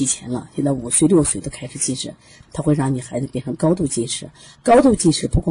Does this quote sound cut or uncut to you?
cut